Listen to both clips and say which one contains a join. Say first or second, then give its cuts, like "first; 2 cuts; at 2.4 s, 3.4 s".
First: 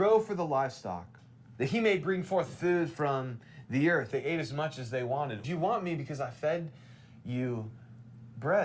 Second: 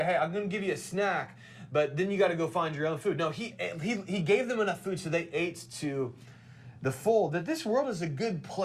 first; 3 cuts; at 1.5 s, 4.1 s, 5.4 s